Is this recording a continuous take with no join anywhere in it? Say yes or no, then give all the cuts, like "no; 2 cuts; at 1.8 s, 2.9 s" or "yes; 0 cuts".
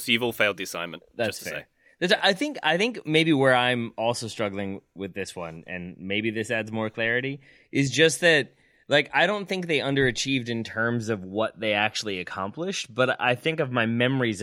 yes; 0 cuts